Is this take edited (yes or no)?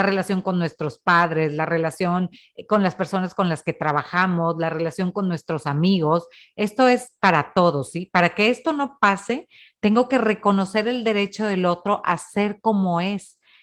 no